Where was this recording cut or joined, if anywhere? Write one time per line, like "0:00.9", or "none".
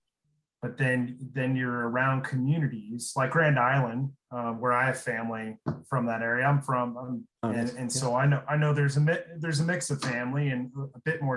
0:07.3